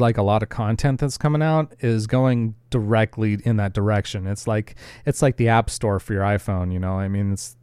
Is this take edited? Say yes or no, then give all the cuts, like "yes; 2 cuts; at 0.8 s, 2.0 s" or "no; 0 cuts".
no; 0 cuts